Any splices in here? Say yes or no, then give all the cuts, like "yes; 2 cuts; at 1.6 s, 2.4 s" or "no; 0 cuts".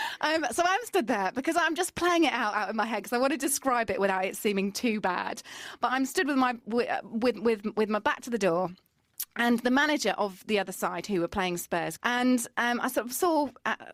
yes; 1 cut; at 12.0 s